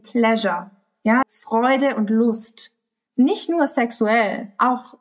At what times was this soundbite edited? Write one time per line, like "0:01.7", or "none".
0:01.2
0:03.1